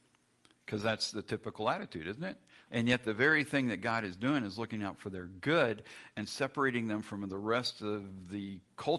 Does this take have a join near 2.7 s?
yes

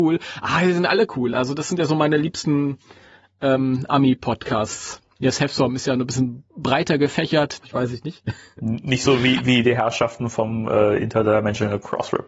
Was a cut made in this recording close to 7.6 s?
yes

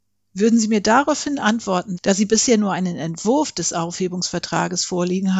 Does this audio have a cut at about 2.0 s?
yes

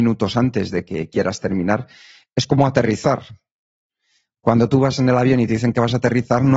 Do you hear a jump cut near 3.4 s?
no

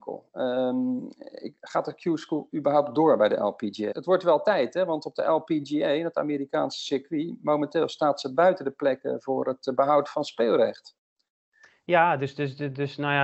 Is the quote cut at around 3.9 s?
yes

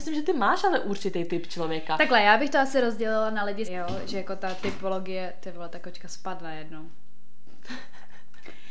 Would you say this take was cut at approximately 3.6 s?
yes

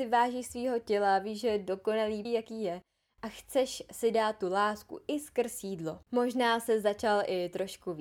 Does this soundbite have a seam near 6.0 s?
yes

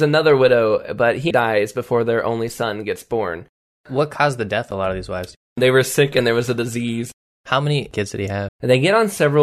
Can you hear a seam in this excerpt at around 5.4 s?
no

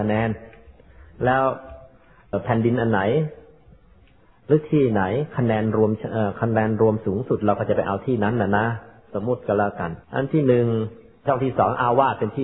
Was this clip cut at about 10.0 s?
yes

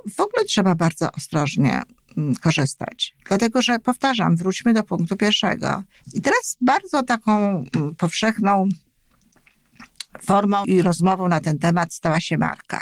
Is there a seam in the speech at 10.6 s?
yes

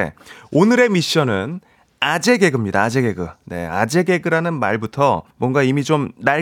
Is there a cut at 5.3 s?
yes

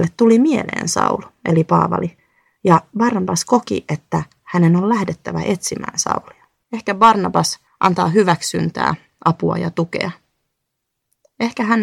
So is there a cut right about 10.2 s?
no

